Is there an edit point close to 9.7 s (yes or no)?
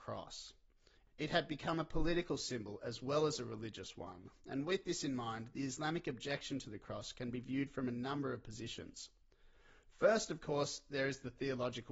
no